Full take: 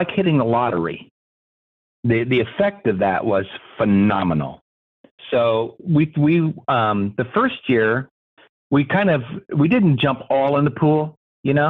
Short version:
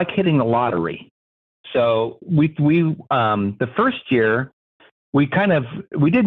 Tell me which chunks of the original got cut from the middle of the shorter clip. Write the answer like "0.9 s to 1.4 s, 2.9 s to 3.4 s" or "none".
1.6 s to 5.2 s